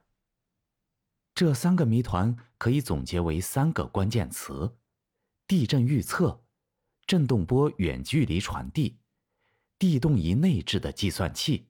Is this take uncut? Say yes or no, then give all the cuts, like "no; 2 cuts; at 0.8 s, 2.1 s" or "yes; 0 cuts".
yes; 0 cuts